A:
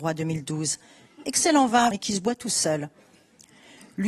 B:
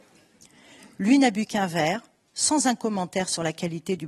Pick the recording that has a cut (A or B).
A